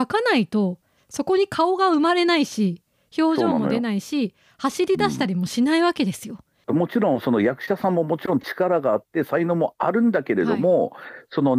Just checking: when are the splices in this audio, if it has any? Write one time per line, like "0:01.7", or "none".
none